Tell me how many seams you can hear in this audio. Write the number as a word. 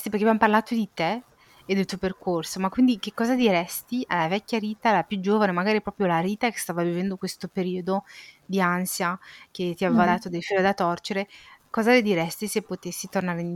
zero